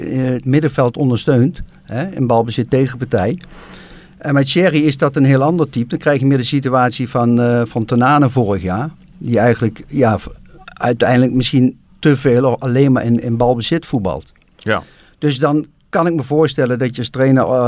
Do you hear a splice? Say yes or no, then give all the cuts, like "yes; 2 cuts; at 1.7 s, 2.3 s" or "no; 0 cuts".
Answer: no; 0 cuts